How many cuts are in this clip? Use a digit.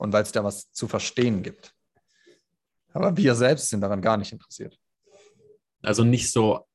1